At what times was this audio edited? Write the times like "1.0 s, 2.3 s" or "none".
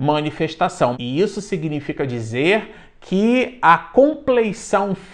0.9 s